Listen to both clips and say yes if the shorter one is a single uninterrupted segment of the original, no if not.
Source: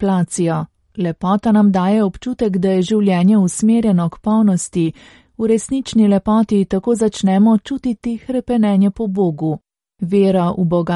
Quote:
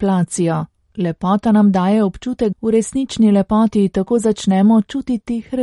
no